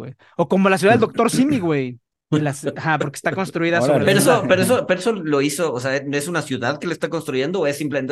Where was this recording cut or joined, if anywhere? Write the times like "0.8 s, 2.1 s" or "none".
2.2 s, 4.0 s